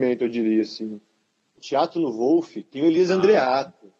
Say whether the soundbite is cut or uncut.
cut